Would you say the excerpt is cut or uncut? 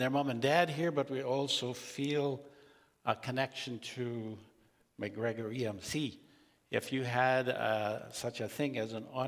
uncut